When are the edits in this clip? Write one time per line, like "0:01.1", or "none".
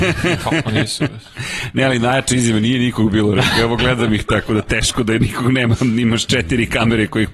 none